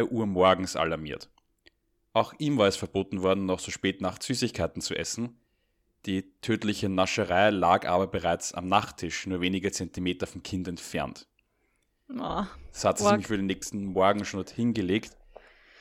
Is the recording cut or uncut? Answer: uncut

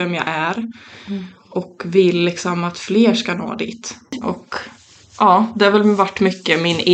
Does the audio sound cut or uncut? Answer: cut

